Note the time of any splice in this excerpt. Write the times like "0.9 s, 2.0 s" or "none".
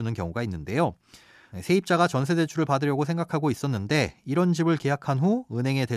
1.5 s